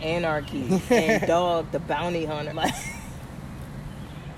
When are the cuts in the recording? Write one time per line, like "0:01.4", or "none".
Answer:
0:02.5

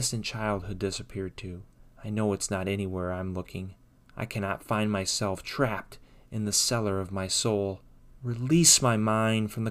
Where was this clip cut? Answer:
none

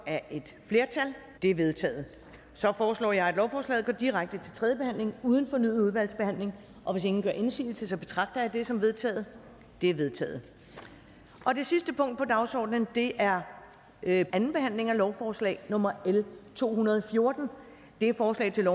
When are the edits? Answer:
0:01.4
0:14.3

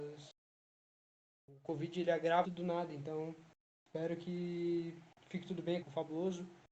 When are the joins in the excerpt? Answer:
0:02.4
0:05.8

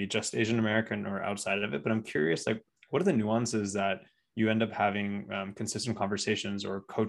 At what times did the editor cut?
none

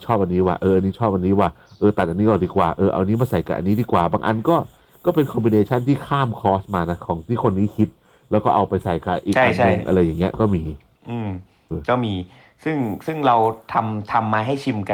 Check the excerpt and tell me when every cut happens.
0:11.7

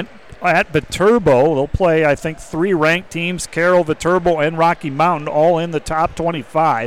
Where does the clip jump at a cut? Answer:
none

